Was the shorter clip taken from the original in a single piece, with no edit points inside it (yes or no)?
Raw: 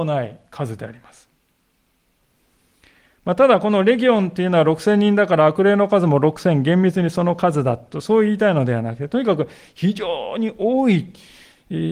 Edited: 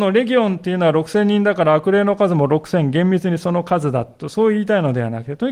yes